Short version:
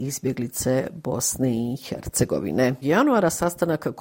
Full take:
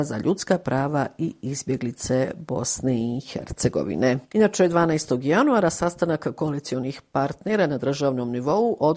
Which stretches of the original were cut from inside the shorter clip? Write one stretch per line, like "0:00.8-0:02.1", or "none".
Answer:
0:04.3-0:05.2